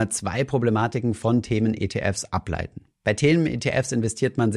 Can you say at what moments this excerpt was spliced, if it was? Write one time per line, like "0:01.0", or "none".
0:02.9